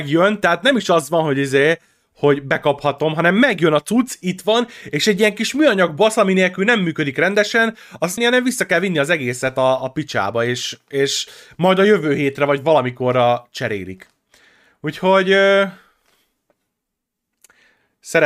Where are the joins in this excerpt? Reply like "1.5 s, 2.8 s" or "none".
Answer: 8.2 s